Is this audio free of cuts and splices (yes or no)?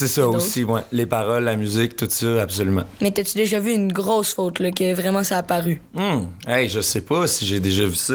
yes